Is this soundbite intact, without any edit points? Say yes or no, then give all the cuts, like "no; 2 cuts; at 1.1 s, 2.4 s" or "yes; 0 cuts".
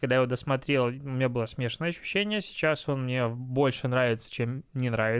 yes; 0 cuts